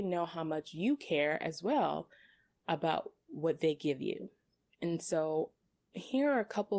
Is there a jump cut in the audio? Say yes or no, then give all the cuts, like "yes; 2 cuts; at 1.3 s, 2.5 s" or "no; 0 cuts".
no; 0 cuts